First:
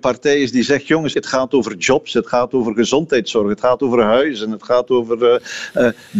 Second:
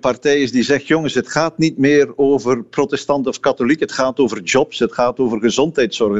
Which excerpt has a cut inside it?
first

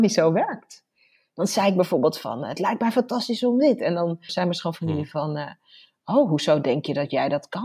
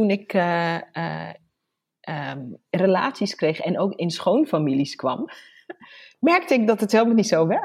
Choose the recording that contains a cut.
first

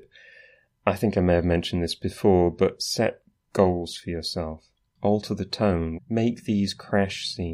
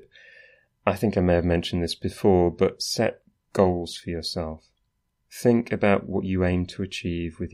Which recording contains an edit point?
first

